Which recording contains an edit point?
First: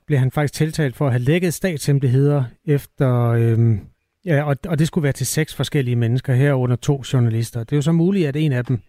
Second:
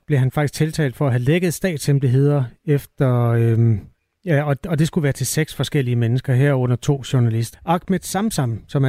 second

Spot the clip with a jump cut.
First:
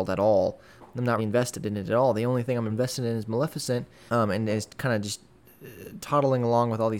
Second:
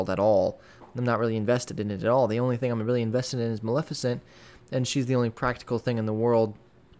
first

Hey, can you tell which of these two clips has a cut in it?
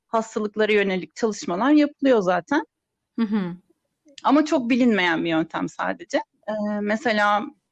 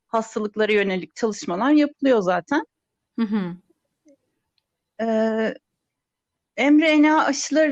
first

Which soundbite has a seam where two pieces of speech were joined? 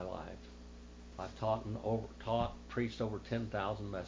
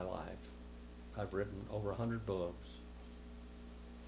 first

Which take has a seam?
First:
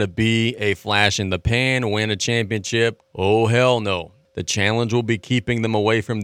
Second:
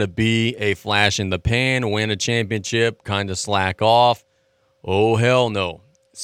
first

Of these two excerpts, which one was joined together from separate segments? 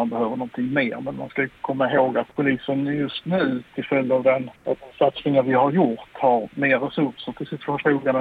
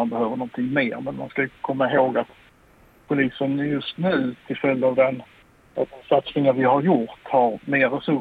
first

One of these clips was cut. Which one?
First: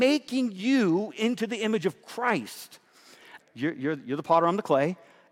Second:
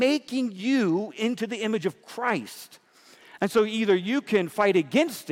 first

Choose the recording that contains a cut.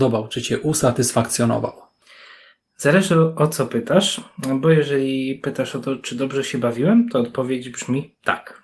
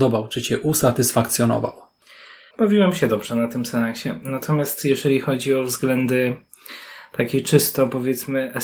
second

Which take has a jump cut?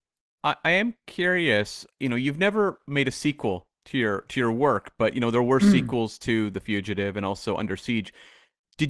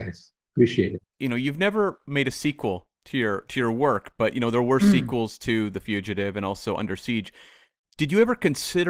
second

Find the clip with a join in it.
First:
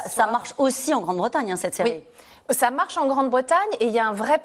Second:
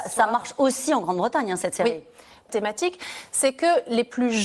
second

